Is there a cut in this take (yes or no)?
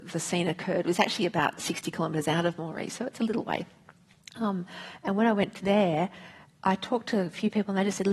no